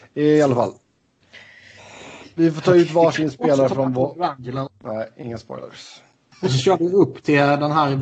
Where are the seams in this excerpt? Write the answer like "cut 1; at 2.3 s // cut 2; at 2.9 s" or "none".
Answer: cut 1; at 4.7 s // cut 2; at 6.3 s